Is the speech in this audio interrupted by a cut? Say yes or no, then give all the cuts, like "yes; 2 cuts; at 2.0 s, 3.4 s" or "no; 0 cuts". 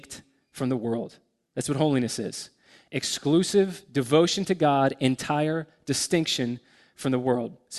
no; 0 cuts